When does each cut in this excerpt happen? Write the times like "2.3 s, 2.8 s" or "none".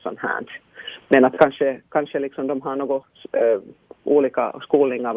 none